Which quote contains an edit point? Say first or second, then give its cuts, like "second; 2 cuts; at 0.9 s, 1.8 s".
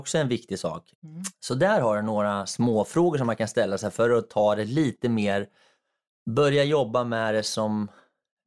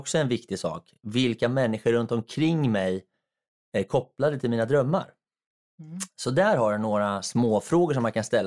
first; 1 cut; at 1.0 s